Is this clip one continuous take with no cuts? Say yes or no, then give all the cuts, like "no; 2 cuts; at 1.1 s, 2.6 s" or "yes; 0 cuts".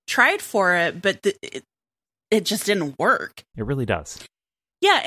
no; 1 cut; at 3.5 s